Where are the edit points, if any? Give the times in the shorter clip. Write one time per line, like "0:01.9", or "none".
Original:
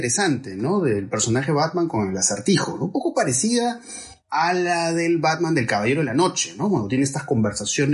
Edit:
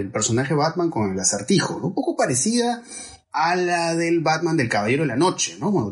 none